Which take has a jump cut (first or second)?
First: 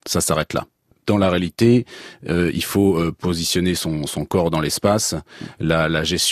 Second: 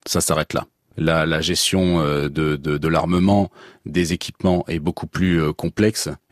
second